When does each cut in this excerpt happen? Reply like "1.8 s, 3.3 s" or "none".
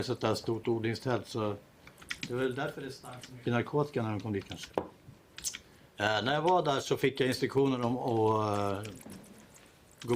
4.7 s